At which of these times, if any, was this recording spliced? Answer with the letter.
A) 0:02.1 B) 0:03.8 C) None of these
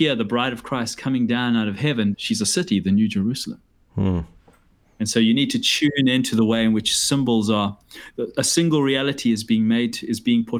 A